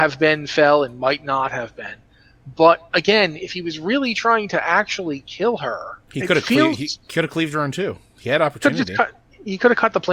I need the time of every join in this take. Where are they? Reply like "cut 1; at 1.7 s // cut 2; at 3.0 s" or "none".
cut 1; at 6.0 s